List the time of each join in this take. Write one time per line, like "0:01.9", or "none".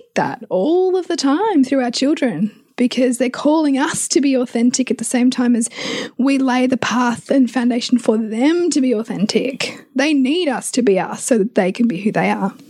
none